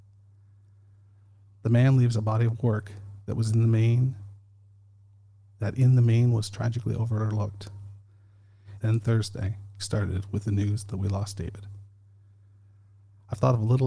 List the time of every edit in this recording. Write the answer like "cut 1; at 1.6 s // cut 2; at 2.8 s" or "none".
cut 1; at 8.8 s // cut 2; at 9.8 s